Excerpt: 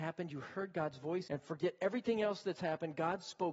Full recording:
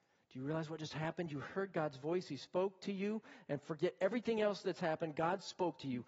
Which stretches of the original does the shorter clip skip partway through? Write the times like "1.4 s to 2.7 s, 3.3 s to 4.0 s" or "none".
2.2 s to 3.4 s